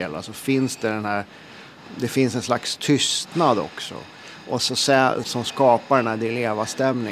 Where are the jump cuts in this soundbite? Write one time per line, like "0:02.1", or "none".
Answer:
0:05.2